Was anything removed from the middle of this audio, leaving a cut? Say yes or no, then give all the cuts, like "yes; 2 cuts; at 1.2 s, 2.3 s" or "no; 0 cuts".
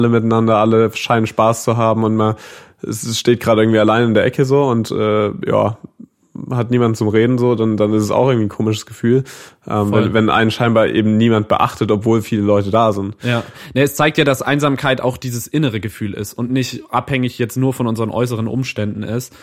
no; 0 cuts